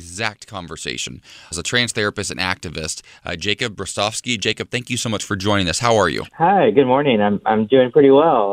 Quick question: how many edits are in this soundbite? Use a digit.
2